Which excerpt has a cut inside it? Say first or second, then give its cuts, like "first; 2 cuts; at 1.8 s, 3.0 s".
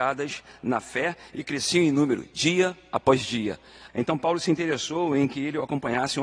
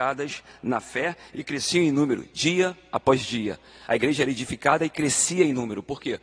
first; 1 cut; at 3.9 s